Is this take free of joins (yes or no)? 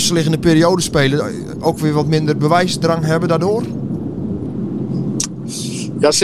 yes